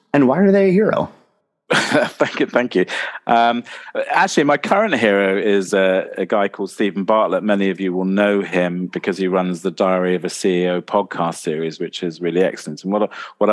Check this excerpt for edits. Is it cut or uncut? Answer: uncut